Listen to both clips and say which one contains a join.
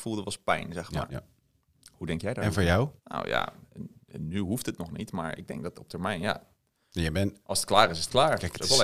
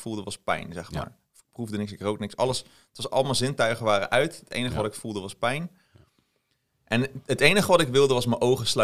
first; 2 cuts; at 1.1 s, 3.0 s

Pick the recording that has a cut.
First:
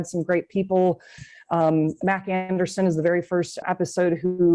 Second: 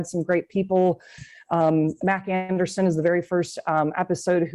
first; 1 cut; at 3.6 s

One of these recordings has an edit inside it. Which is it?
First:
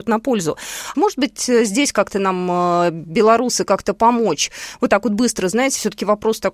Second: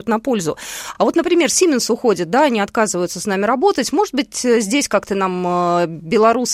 first; 1 cut; at 0.9 s

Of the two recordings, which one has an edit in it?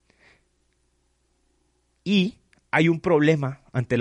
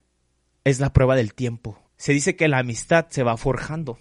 second; 1 cut; at 1.9 s

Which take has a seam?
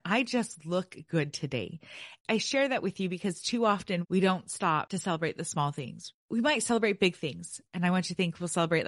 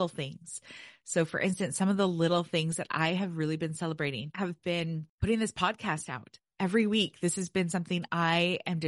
first; 1 cut; at 2.2 s

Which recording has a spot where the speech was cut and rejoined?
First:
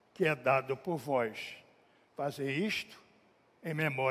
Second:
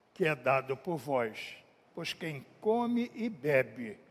second; 1 cut; at 1.9 s

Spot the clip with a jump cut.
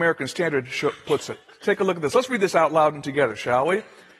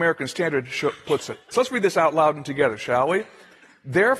second; 1 cut; at 1.5 s

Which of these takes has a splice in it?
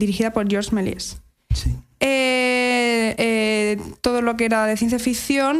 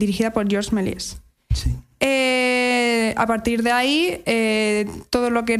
first; 1 cut; at 3.1 s

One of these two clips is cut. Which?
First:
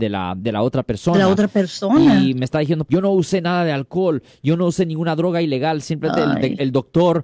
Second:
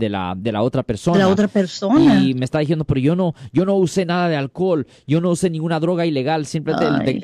first; 1 cut; at 2.9 s

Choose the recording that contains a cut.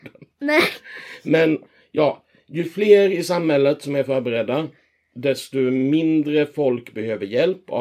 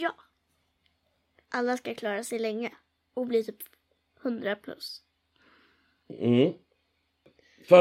second; 1 cut; at 1.4 s

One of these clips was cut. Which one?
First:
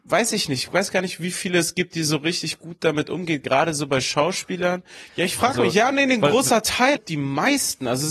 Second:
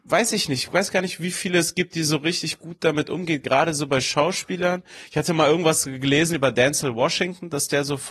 first; 2 cuts; at 5.1 s, 7.0 s

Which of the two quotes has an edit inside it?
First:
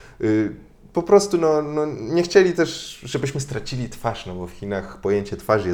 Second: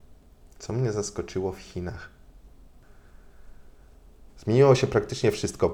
second; 1 cut; at 4.3 s

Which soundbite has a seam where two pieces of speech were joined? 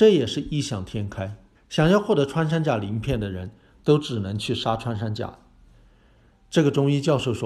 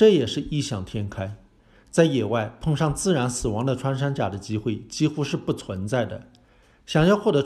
first; 1 cut; at 1.5 s

